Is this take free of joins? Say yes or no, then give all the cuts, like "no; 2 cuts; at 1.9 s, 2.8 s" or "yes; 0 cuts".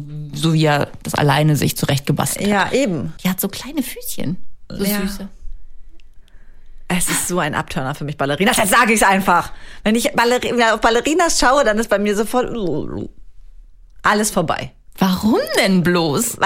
no; 1 cut; at 3.2 s